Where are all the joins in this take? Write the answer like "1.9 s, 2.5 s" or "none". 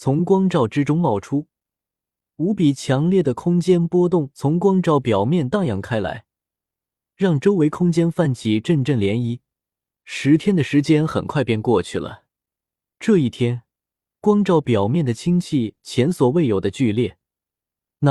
10.0 s